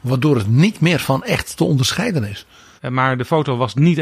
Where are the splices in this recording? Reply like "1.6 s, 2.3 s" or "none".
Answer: 2.8 s

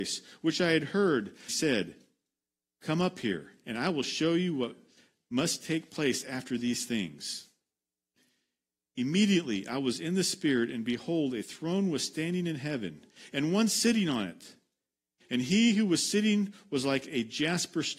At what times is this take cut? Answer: 1.5 s

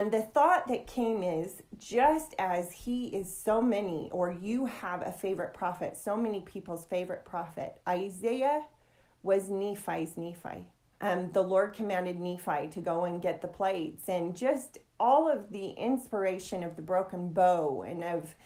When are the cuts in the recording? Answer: 10.9 s

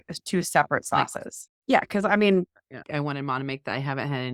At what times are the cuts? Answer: 1.5 s, 2.8 s

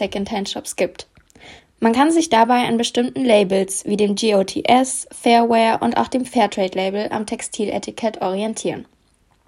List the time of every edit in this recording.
1.6 s

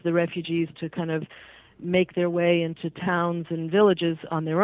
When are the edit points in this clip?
none

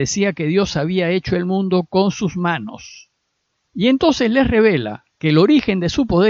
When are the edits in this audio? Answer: 3.7 s, 5.1 s

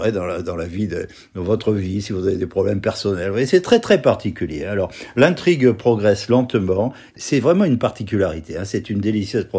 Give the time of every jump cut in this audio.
7.1 s

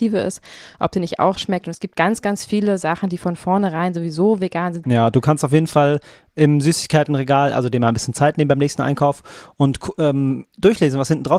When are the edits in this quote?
4.8 s

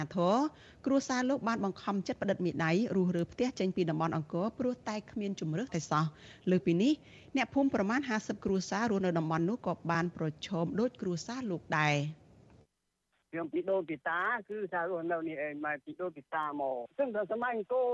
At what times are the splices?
5.7 s

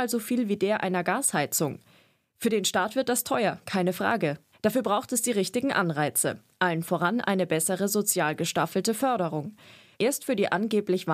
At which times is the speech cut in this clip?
4.5 s, 9.9 s

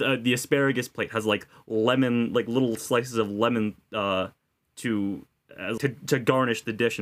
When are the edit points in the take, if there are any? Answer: 5.8 s

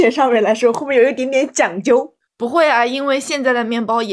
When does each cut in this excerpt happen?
none

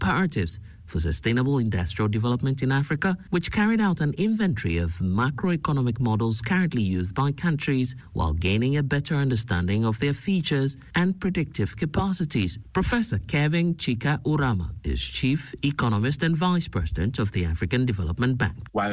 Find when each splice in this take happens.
3.3 s

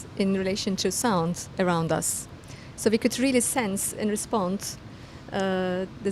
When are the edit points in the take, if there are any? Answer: 2.7 s

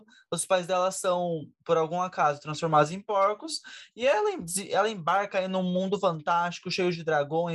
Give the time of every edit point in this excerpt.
none

